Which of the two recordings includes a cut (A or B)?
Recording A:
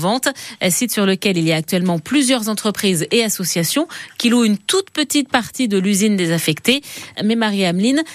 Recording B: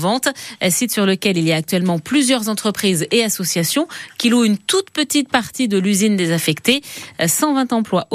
A